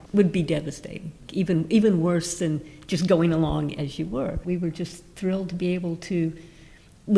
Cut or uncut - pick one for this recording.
cut